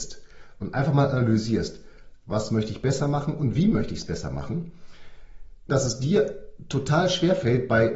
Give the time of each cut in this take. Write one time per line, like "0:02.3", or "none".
0:02.1
0:05.7

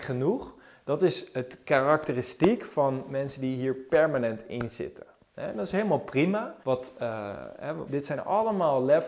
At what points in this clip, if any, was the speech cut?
0:06.6
0:07.9

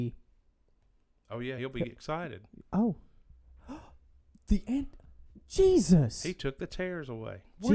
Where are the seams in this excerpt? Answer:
none

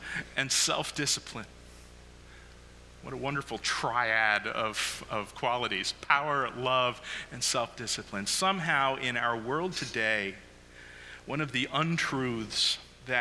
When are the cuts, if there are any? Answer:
none

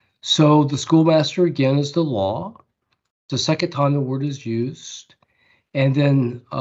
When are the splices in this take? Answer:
none

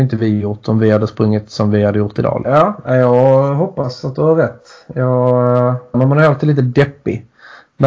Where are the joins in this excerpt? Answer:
0:02.5
0:05.9

